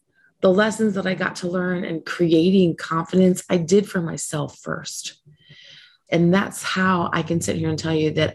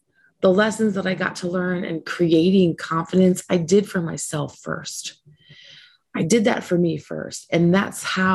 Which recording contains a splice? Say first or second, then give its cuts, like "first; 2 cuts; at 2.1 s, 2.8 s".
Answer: first; 1 cut; at 6.1 s